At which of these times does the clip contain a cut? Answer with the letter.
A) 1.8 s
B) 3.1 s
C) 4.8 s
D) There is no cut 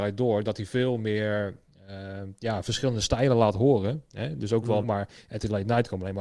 C